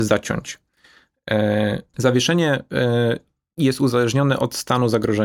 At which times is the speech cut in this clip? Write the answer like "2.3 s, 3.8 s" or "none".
1.9 s